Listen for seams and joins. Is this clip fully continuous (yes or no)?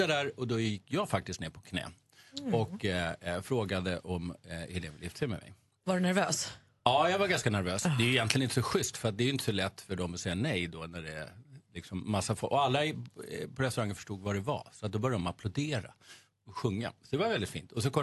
yes